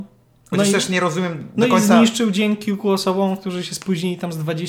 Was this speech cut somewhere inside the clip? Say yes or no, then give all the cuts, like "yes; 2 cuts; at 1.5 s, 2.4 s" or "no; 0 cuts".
no; 0 cuts